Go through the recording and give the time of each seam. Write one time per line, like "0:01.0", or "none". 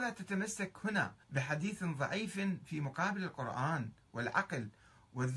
0:01.2